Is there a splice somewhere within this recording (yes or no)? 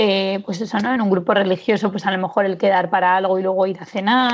no